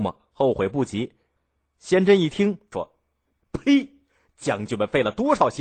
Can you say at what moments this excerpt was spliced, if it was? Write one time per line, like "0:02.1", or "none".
0:01.4
0:02.7